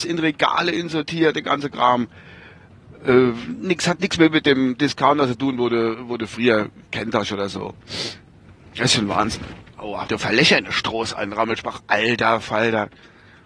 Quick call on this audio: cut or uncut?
cut